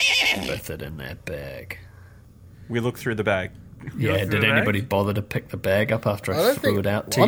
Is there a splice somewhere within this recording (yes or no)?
no